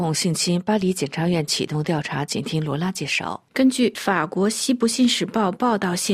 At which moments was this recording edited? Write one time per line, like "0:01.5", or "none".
0:03.5